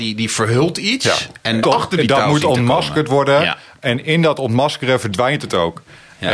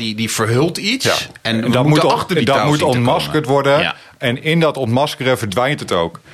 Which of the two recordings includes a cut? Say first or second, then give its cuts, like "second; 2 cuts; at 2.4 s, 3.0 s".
first; 1 cut; at 1.6 s